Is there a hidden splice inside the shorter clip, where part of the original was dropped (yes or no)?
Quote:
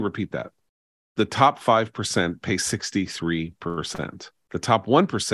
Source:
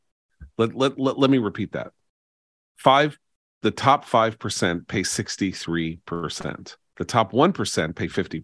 yes